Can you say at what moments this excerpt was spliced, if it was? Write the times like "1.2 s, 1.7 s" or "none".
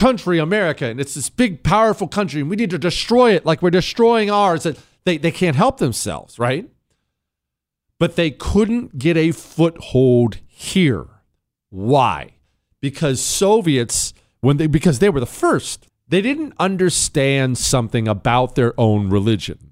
15.9 s